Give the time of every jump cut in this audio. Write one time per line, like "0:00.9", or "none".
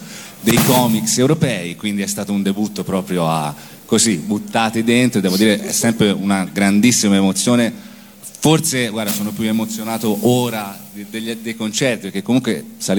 none